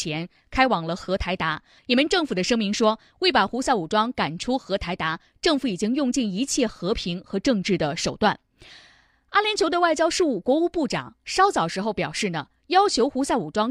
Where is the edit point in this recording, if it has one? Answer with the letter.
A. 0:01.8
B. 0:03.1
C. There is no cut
A